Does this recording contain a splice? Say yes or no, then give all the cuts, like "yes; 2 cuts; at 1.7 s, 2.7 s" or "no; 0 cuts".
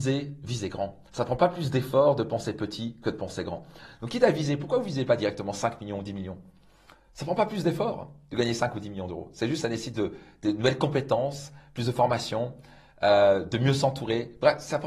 no; 0 cuts